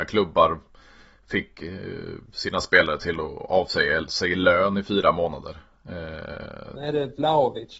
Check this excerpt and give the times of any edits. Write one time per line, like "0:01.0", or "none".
0:06.8